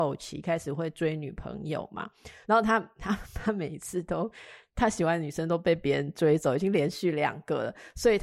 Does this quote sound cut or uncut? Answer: uncut